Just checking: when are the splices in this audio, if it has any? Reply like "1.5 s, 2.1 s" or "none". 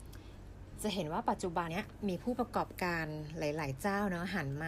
1.7 s